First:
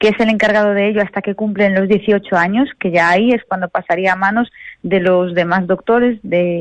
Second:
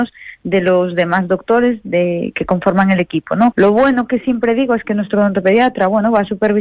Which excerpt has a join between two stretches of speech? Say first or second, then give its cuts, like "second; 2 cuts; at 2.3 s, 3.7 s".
second; 1 cut; at 3.5 s